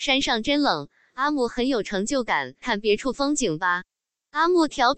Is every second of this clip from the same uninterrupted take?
no; 2 cuts; at 1.0 s, 2.6 s

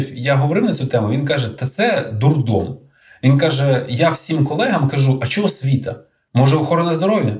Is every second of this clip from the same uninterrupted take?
yes; 0 cuts

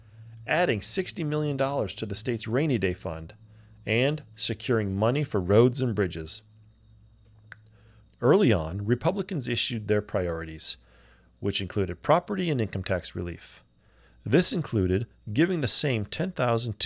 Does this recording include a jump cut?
yes; 1 cut; at 8.0 s

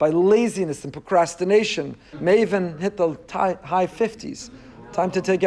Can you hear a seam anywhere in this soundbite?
yes; 1 cut; at 2.1 s

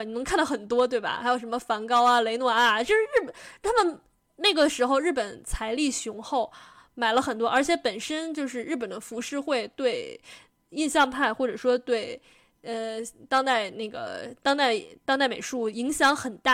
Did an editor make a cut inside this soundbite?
no; 0 cuts

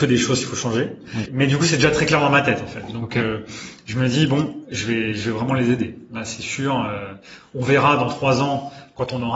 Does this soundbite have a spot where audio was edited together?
yes; 1 cut; at 1.3 s

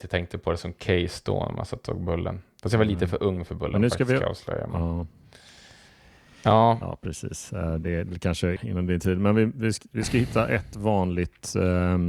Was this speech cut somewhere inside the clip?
yes; 1 cut; at 8.6 s

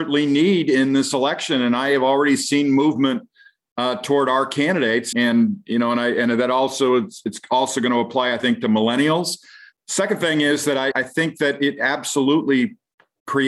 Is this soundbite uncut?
no; 3 cuts; at 5.1 s, 9.7 s, 10.9 s

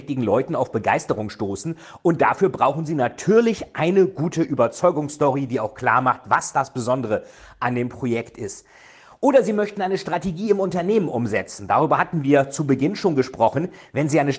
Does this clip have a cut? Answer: no; 0 cuts

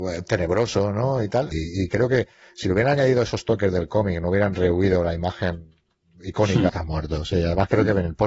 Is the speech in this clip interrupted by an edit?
yes; 2 cuts; at 1.5 s, 6.7 s

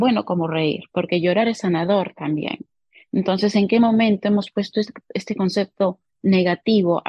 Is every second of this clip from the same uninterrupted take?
yes; 0 cuts

